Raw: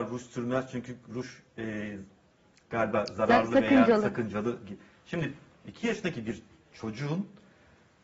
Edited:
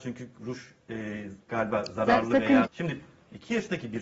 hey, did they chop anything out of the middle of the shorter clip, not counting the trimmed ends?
yes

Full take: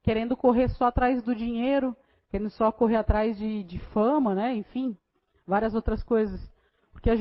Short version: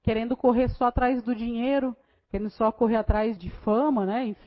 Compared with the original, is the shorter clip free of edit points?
no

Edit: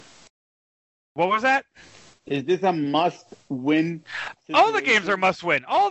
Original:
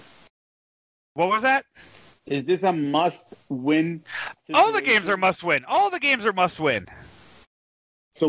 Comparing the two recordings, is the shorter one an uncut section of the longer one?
yes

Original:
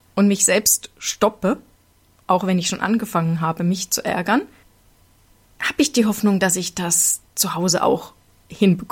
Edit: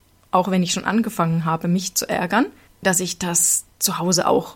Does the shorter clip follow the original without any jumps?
no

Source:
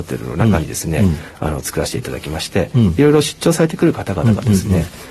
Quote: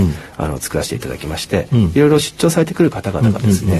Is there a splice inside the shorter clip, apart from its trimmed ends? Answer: no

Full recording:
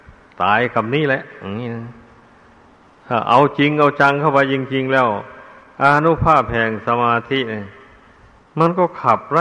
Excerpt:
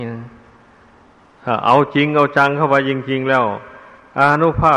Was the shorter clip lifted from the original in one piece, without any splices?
yes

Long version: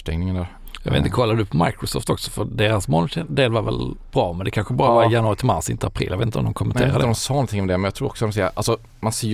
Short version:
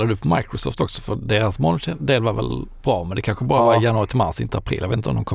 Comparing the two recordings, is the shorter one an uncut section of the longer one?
yes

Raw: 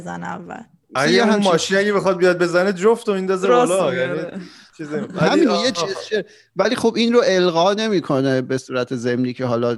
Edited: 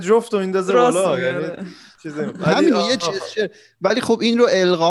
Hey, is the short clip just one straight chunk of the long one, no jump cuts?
yes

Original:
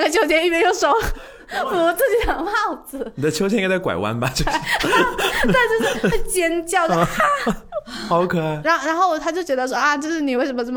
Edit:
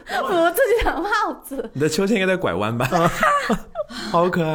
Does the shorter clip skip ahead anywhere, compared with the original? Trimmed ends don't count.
yes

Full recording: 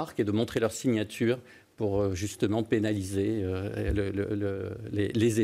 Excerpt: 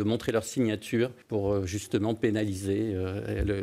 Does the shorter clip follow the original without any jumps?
no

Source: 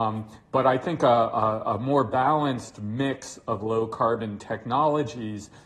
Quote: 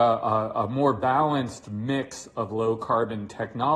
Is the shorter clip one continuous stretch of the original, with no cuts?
yes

